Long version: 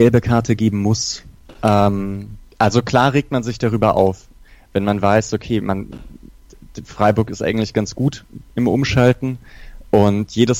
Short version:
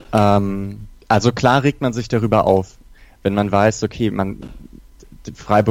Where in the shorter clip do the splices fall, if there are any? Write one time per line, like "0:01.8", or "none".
none